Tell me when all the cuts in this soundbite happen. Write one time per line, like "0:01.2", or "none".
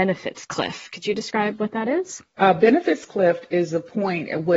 0:02.4

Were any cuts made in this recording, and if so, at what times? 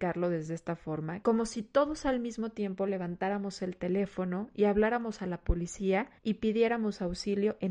0:01.2
0:06.2

